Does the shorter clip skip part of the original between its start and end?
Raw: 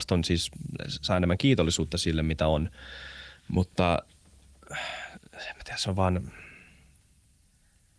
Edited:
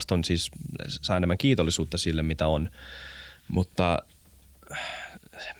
no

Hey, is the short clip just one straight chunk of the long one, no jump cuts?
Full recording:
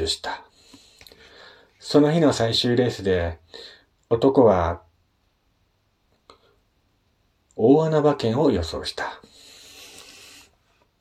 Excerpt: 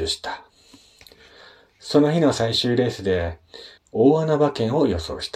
no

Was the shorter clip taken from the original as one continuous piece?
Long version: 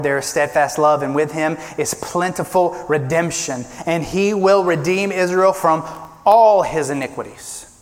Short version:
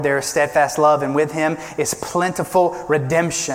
yes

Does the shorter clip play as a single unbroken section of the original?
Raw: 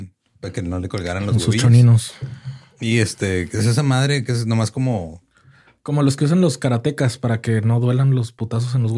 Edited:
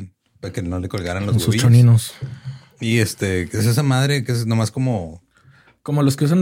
yes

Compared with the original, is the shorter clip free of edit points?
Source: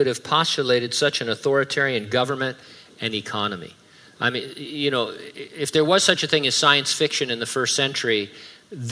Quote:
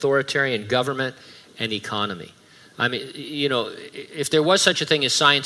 yes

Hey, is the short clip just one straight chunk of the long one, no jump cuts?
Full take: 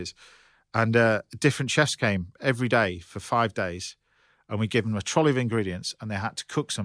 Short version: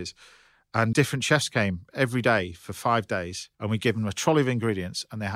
no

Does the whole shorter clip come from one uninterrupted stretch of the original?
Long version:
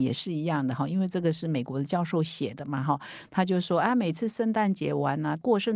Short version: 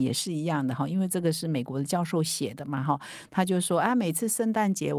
yes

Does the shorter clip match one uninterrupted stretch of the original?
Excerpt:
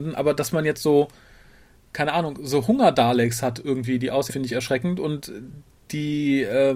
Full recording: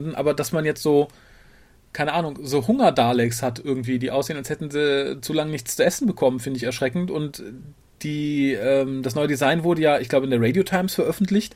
no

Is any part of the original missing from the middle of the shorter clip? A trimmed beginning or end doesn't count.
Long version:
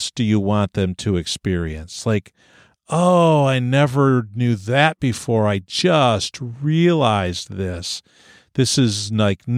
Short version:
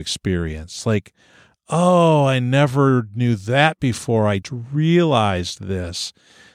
yes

